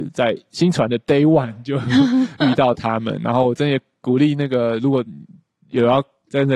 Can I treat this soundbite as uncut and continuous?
yes; 0 cuts

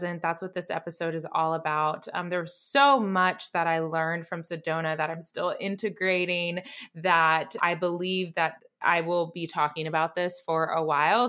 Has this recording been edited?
no; 0 cuts

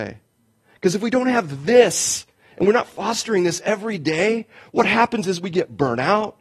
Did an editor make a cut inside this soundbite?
no; 0 cuts

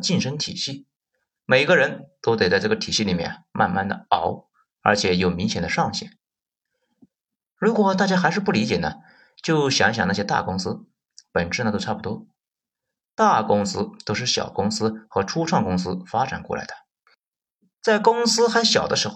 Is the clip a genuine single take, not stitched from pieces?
yes; 0 cuts

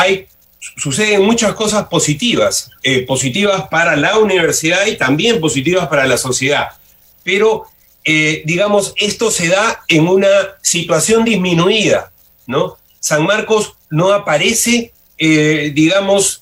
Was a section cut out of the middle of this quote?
no; 0 cuts

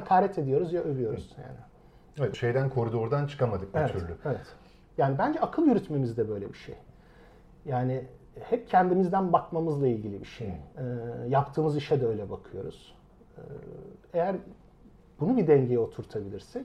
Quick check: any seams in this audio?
yes; 2 cuts; at 2.3 s, 10.7 s

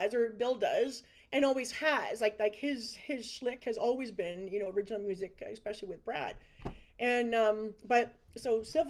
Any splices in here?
no; 0 cuts

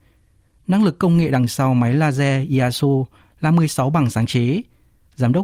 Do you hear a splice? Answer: no; 0 cuts

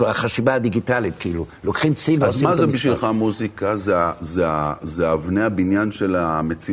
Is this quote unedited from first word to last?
yes; 0 cuts

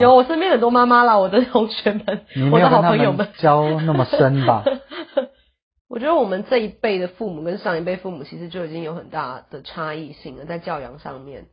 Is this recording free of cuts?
no; 2 cuts; at 3.3 s, 5.8 s

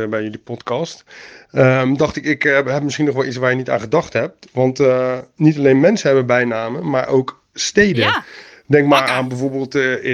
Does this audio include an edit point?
no; 0 cuts

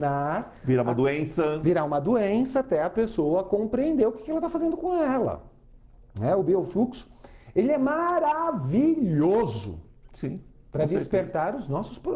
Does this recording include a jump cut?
no; 0 cuts

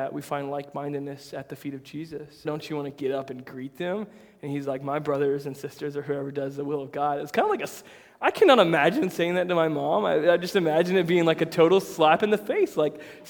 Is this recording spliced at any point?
yes; 1 cut; at 2.4 s

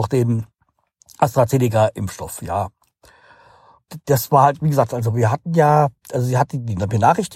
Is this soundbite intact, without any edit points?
yes; 0 cuts

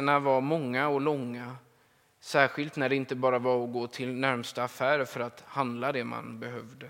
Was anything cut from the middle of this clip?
no; 0 cuts

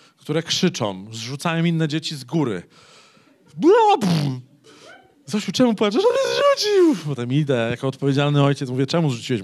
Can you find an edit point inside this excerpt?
no; 0 cuts

